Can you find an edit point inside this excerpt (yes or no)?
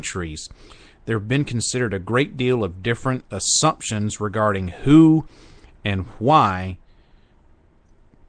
no